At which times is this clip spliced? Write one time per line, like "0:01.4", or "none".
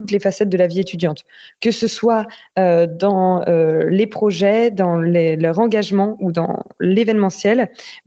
none